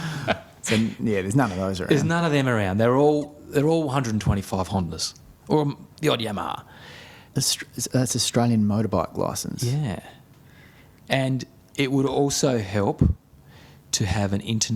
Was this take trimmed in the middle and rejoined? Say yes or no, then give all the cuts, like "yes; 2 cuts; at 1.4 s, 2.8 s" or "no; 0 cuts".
yes; 1 cut; at 7.3 s